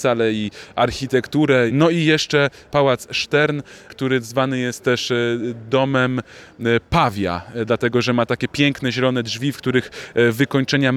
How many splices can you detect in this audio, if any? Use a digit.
1